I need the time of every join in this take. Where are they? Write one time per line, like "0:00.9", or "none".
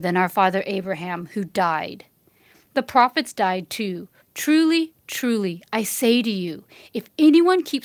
0:04.2